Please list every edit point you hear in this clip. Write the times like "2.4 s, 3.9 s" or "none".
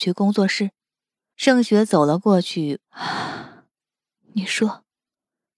1.3 s, 2.8 s